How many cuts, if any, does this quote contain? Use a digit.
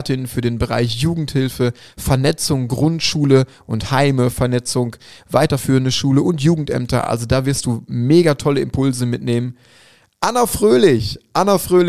0